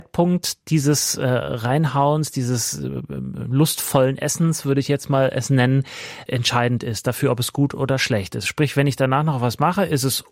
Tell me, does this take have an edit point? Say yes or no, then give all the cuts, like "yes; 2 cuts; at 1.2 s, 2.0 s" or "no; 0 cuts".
no; 0 cuts